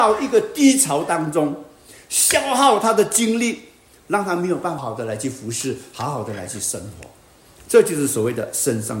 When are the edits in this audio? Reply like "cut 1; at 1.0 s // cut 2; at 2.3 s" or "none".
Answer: cut 1; at 4.8 s